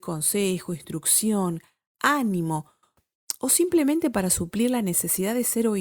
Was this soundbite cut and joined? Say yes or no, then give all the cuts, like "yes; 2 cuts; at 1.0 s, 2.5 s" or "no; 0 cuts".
no; 0 cuts